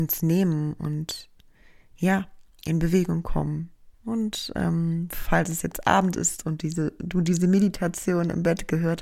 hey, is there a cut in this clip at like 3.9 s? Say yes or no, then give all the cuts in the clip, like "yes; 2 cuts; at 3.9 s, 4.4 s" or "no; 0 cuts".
yes; 1 cut; at 3.9 s